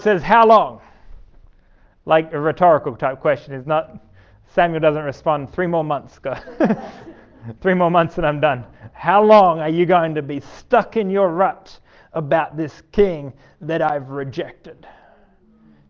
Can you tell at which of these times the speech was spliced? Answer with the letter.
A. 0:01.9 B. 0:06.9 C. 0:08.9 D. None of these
C